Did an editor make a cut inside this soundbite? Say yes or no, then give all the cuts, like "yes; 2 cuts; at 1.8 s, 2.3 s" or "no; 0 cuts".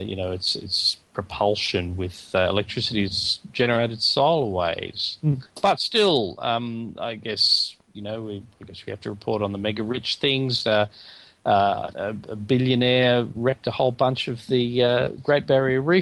yes; 1 cut; at 11.9 s